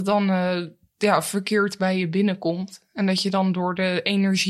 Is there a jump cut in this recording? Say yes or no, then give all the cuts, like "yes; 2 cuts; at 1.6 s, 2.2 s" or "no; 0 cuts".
no; 0 cuts